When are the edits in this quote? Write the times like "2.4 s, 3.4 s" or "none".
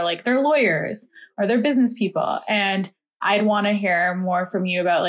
none